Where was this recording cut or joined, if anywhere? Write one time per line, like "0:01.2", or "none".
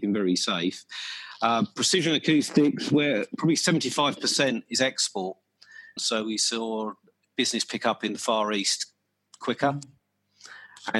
0:06.0